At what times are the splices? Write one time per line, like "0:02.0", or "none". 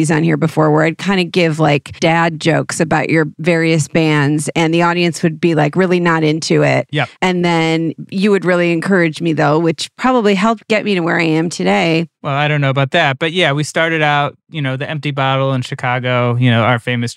none